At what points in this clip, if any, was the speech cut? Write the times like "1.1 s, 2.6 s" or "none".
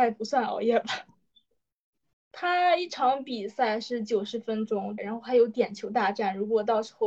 2.1 s, 5.0 s